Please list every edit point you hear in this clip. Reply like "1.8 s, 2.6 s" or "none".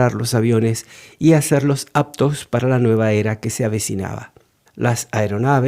4.7 s